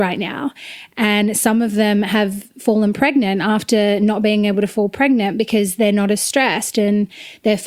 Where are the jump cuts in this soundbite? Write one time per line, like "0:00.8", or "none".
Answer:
none